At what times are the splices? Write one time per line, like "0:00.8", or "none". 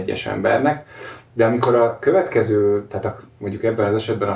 none